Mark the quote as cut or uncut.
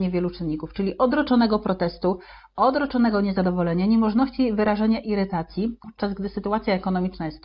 cut